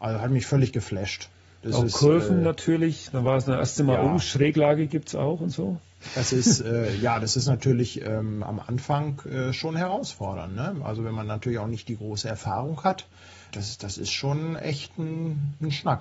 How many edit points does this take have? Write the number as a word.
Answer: one